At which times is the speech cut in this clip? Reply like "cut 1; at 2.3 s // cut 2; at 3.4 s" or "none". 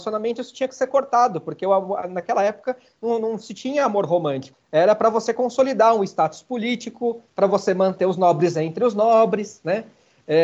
cut 1; at 4.5 s // cut 2; at 7.3 s